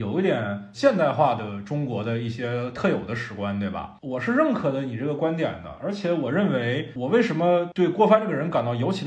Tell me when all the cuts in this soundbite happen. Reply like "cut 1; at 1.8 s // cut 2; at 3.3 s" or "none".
none